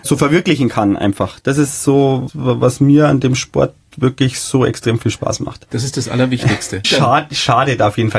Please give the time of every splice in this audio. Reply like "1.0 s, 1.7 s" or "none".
5.7 s, 6.8 s